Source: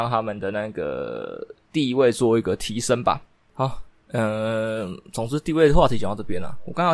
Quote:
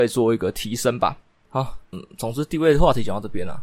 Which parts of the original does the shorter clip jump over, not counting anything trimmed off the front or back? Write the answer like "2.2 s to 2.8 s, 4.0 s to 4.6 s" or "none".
4.0 s to 4.9 s

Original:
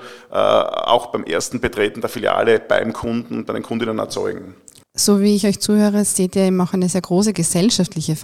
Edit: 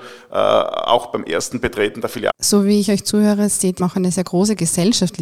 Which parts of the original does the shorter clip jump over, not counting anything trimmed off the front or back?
2.3 s to 4.9 s, 6.3 s to 6.6 s

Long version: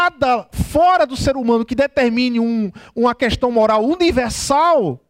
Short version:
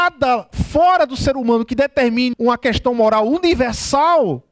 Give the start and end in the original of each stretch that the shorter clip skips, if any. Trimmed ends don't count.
2.3 s to 2.9 s

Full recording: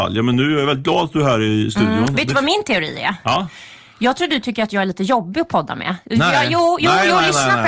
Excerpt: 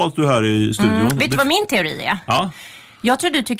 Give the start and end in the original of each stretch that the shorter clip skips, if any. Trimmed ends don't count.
none

